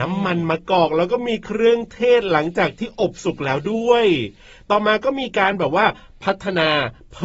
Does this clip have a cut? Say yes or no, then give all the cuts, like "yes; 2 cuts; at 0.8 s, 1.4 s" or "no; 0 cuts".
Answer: no; 0 cuts